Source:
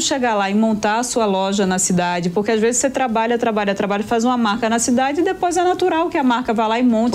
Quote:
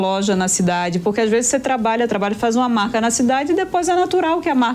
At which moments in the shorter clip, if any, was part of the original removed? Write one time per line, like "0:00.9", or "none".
0:02.1